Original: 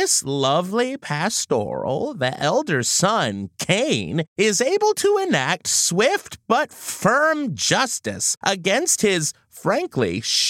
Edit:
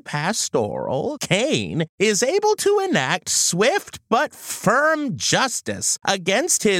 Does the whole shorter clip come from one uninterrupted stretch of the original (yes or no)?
no